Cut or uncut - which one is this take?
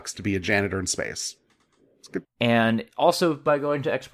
cut